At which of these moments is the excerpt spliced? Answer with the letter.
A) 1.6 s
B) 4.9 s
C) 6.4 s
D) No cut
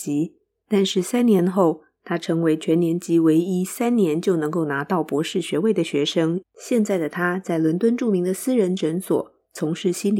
C